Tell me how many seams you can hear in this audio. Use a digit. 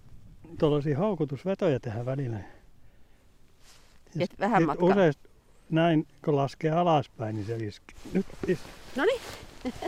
1